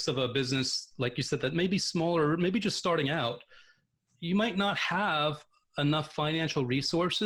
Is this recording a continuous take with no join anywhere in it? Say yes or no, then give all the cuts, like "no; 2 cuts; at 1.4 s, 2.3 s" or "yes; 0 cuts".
yes; 0 cuts